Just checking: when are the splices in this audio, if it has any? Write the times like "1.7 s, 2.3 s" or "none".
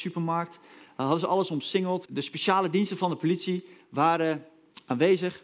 2.0 s